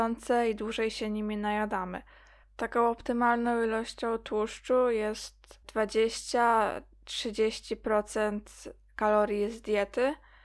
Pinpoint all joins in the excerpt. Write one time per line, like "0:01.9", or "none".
0:02.4
0:05.6